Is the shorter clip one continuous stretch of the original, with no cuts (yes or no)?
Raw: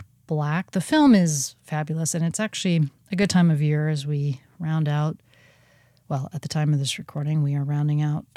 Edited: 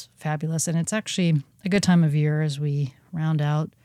yes